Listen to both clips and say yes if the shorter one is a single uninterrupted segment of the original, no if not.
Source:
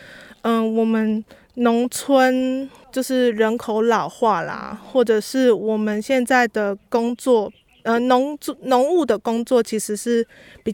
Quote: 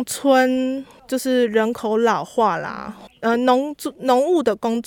no